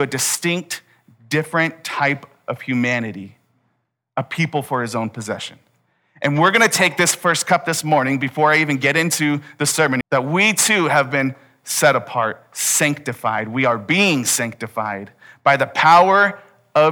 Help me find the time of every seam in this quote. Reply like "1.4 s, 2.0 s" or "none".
10.0 s

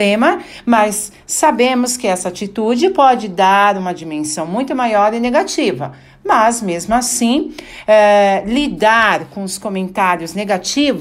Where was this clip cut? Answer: none

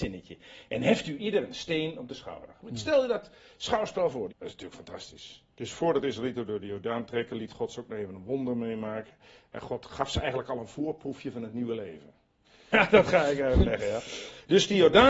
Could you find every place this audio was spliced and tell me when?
4.3 s, 5.5 s, 12.7 s

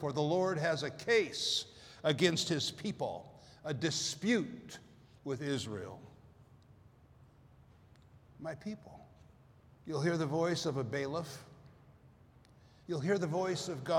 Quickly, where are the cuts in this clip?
9.7 s, 12.8 s

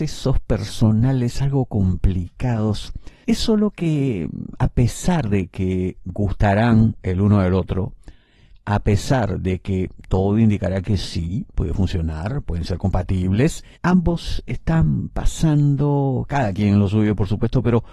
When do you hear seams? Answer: 3.2 s, 11.5 s, 13.8 s

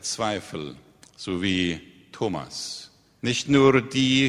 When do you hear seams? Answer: 3.2 s

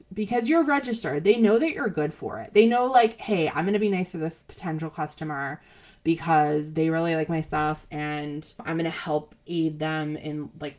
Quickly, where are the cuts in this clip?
none

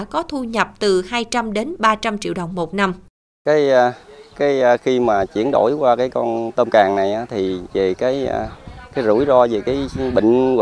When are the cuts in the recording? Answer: none

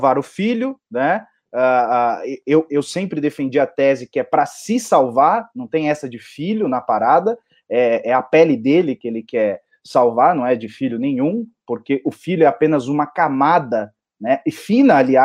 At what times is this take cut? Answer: none

